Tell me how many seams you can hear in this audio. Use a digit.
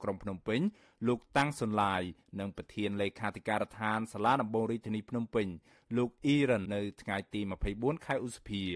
1